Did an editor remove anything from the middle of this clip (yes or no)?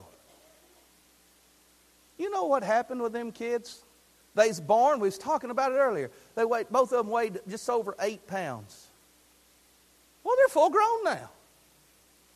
no